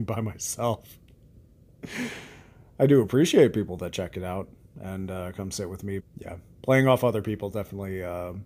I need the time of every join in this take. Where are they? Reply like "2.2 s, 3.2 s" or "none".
6.0 s